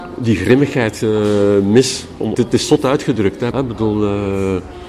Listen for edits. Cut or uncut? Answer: cut